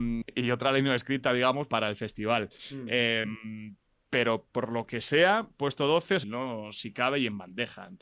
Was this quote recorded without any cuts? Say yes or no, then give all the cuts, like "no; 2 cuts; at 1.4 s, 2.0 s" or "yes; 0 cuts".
no; 2 cuts; at 1.7 s, 6.2 s